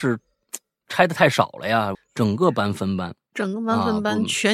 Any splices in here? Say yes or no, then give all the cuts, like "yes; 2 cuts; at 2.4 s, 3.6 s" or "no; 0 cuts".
yes; 1 cut; at 1.9 s